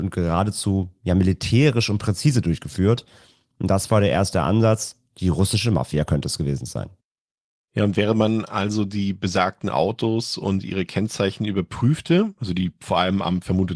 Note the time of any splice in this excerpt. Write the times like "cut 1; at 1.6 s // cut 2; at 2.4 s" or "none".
none